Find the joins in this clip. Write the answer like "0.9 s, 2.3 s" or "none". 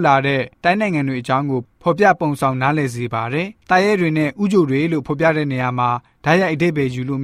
3.6 s